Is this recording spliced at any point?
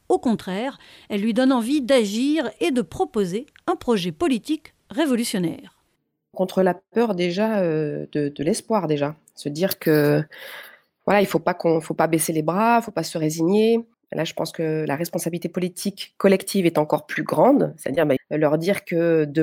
yes; 2 cuts; at 13.9 s, 18.2 s

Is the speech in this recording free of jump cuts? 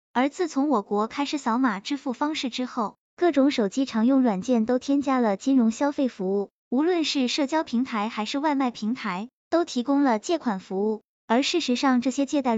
yes; 0 cuts

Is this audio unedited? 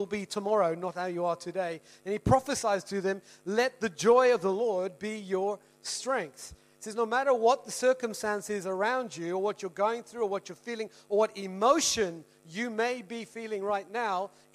yes; 0 cuts

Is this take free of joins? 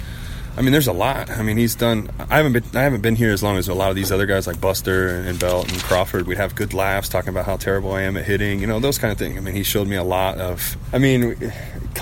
no; 3 cuts; at 6.3 s, 9.3 s, 10.8 s

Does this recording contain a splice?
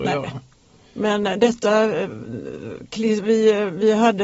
no; 0 cuts

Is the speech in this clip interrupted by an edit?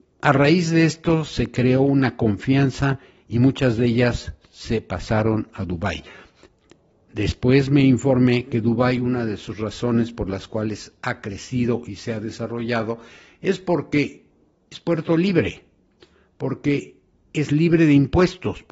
no; 0 cuts

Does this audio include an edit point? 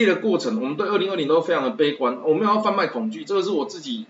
no; 0 cuts

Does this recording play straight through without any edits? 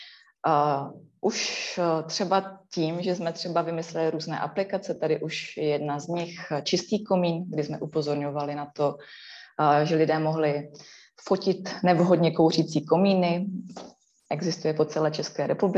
yes; 0 cuts

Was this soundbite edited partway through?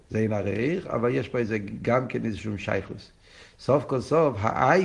no; 0 cuts

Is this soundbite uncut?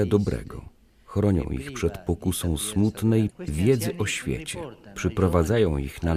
no; 1 cut; at 3.3 s

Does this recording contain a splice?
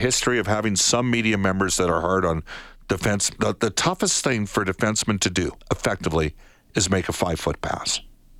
yes; 1 cut; at 5.6 s

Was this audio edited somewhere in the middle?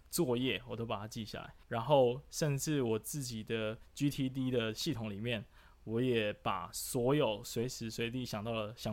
yes; 1 cut; at 1.6 s

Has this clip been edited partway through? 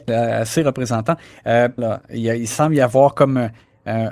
yes; 1 cut; at 1.8 s

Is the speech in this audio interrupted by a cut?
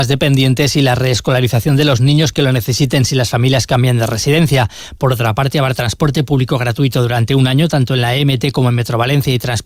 no; 0 cuts

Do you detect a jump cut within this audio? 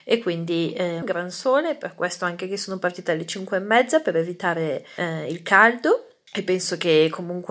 yes; 1 cut; at 1.0 s

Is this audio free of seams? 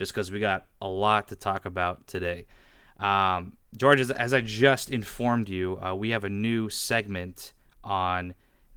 yes; 0 cuts

